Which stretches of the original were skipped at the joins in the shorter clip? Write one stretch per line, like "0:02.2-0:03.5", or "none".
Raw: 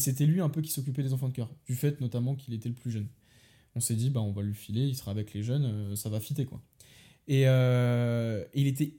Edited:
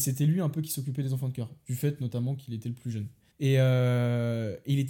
0:03.3-0:07.2